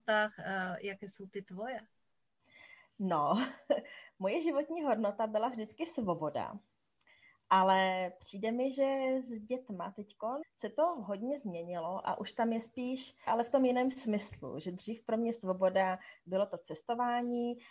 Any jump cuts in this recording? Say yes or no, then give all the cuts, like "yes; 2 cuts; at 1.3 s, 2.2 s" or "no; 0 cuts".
yes; 2 cuts; at 10.4 s, 13.3 s